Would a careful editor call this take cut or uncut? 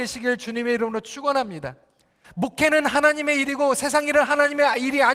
cut